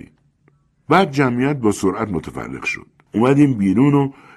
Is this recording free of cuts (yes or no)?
no